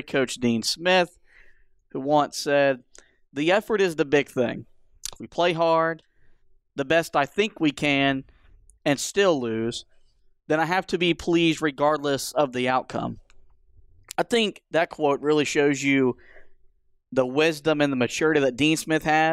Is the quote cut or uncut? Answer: uncut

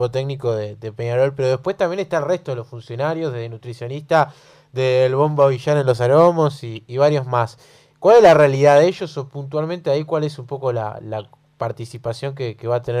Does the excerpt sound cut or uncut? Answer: uncut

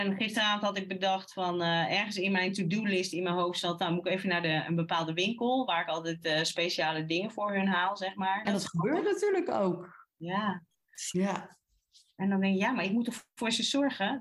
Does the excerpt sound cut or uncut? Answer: cut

